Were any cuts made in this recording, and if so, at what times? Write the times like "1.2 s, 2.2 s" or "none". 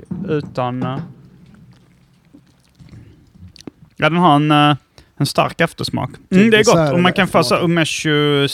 3.9 s, 6.3 s